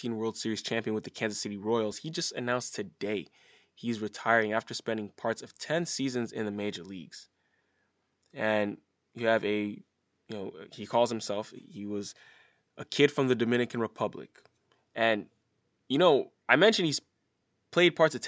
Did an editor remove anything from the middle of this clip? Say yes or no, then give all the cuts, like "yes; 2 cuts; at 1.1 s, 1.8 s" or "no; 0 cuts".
no; 0 cuts